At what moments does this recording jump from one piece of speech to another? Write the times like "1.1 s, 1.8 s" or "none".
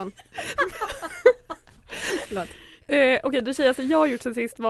2.3 s